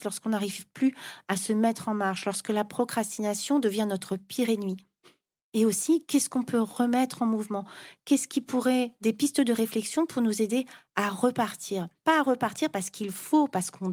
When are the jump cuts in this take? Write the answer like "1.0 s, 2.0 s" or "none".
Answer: 12.0 s